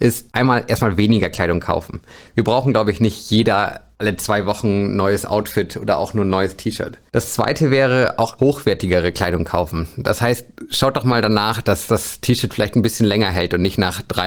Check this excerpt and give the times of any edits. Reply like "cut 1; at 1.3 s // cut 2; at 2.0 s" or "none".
cut 1; at 8.4 s

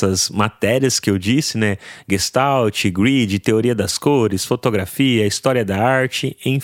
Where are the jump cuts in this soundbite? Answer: none

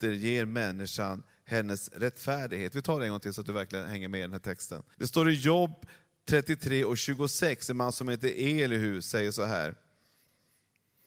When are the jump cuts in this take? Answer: cut 1; at 4.9 s

